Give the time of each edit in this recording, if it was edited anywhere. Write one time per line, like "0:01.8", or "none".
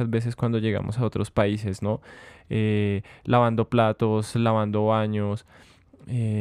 none